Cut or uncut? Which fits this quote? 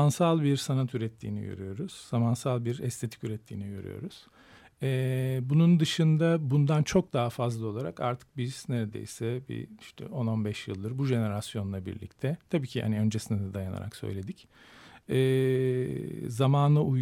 uncut